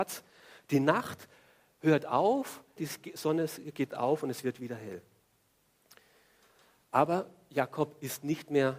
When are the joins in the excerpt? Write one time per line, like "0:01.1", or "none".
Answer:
0:02.8